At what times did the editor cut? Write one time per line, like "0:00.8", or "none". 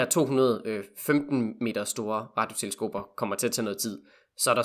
none